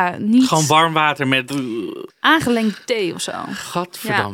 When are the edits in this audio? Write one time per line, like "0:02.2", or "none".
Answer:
0:02.1